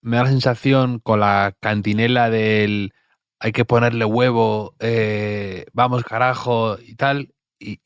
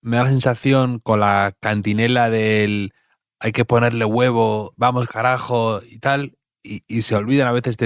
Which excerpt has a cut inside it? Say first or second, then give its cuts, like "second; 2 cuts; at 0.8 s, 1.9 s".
second; 1 cut; at 4.7 s